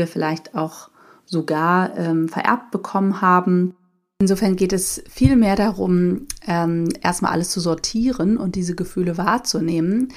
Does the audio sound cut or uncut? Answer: uncut